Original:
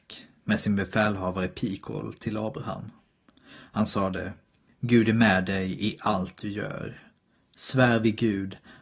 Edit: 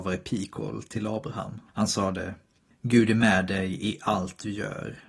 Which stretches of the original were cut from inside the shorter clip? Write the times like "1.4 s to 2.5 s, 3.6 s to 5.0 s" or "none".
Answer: 3.0 s to 3.7 s